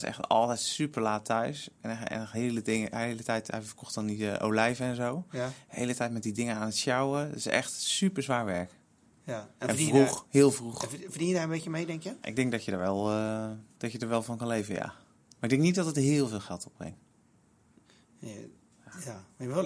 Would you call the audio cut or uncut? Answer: uncut